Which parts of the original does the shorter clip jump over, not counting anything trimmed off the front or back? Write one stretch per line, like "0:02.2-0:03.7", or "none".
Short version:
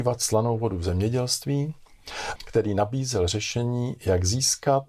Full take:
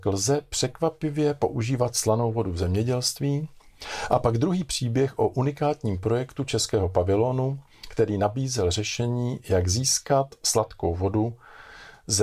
0:04.1-0:07.8